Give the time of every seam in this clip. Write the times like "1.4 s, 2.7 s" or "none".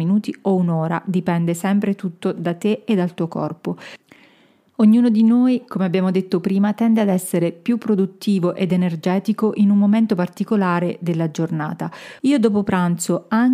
12.2 s